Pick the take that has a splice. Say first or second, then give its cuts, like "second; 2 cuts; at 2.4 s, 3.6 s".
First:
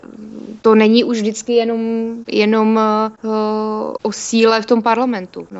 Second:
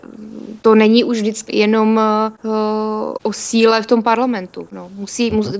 second; 1 cut; at 1.5 s